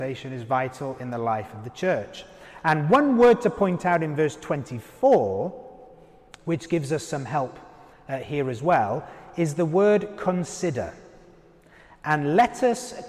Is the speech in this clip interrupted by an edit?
no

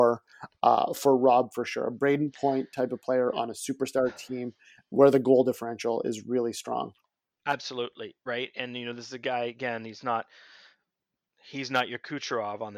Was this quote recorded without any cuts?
yes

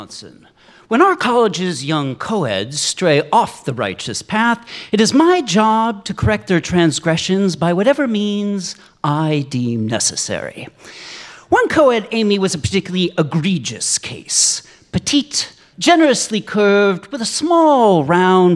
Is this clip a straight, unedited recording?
no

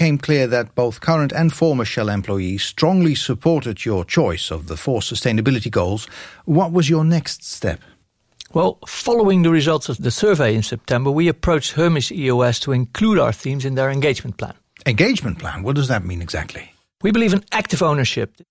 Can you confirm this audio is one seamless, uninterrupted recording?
yes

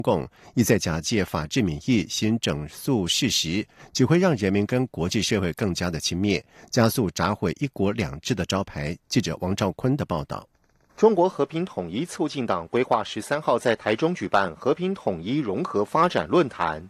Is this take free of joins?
yes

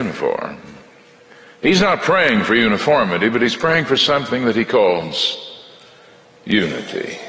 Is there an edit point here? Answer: no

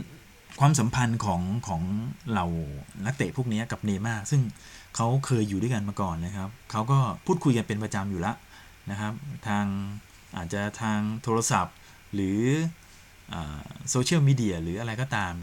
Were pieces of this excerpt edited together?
no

